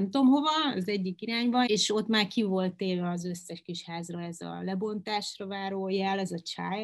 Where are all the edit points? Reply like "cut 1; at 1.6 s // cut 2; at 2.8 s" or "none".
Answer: cut 1; at 1.7 s